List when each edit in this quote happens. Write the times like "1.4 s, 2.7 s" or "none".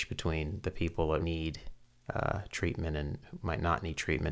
1.2 s